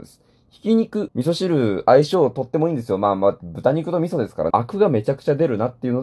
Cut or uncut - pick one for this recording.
cut